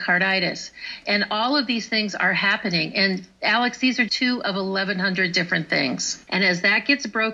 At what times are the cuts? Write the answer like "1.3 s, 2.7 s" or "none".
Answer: 4.1 s, 6.3 s